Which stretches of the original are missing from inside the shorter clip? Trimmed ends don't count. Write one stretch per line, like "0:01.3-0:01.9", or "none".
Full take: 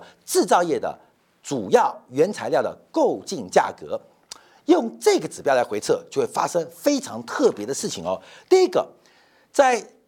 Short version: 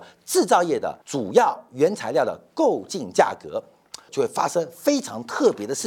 0:01.0-0:01.4
0:04.5-0:06.1